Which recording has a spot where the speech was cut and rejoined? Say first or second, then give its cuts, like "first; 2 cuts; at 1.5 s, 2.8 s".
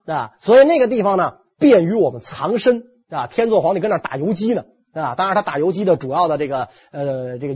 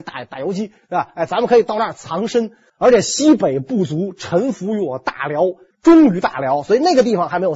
second; 2 cuts; at 2.7 s, 5.7 s